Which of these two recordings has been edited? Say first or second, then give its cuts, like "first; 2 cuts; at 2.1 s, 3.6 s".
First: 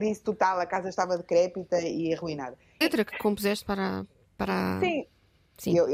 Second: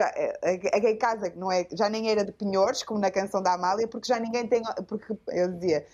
first; 1 cut; at 2.8 s